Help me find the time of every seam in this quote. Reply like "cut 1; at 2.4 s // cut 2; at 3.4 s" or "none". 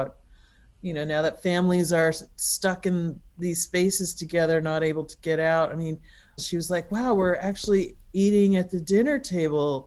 cut 1; at 6.4 s